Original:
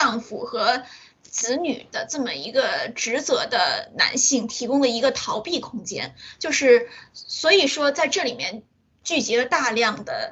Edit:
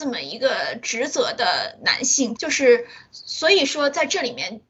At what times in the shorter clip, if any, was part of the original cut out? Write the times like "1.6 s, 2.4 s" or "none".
2.4 s